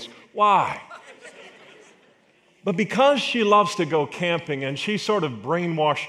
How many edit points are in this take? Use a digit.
0